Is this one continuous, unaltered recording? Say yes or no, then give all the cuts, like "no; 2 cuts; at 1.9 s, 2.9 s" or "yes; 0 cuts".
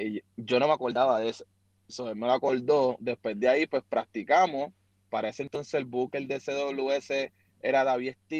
yes; 0 cuts